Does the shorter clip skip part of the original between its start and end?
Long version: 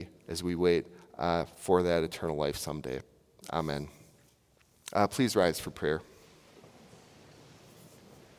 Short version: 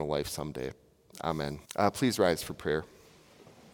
yes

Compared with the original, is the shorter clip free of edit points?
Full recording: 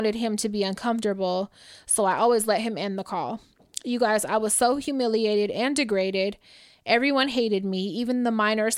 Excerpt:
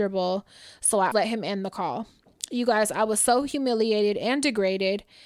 no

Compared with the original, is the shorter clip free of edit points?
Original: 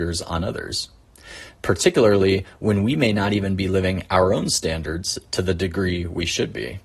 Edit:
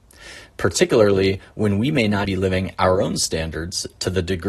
no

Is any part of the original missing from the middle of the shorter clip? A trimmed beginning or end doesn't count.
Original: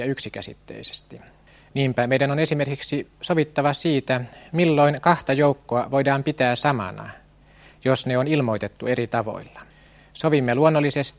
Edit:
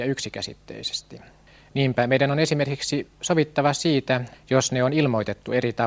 yes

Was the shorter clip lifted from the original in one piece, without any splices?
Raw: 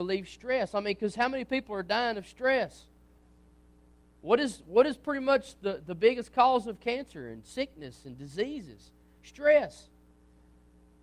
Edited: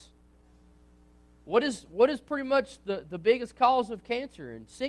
yes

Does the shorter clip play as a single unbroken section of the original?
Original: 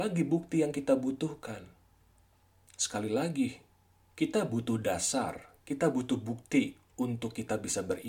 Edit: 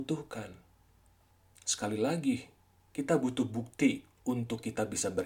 no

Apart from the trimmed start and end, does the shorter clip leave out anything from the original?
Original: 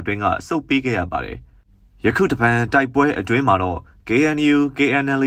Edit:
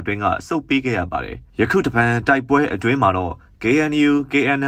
yes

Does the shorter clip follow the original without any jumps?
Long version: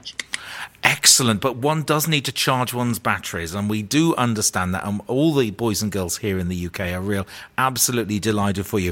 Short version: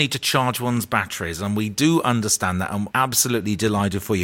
no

